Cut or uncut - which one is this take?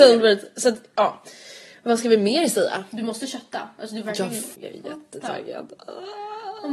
cut